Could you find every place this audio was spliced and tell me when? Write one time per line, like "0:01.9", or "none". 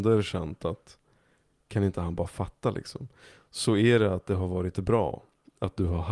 none

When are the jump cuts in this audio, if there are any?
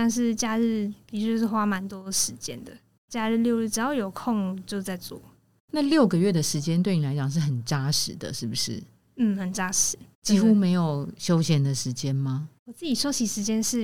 none

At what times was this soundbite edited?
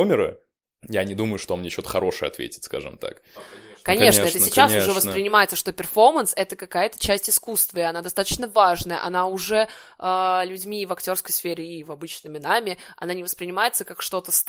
0:03.4

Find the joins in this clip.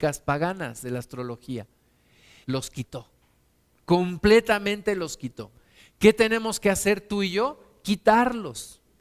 0:02.4

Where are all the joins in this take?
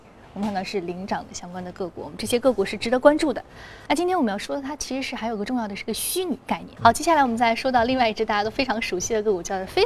0:03.9
0:06.8

